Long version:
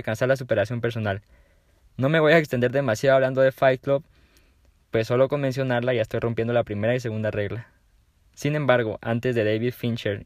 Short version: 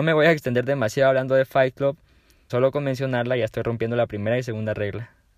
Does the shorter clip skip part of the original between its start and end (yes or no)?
yes